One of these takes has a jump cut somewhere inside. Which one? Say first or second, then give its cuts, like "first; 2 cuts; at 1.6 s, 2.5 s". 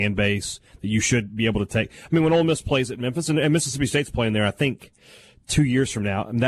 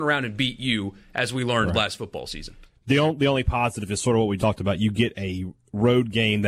second; 1 cut; at 4.4 s